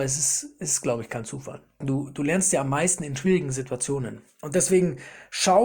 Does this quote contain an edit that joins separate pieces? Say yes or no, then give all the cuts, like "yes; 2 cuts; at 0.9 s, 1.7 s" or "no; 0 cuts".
yes; 1 cut; at 1.8 s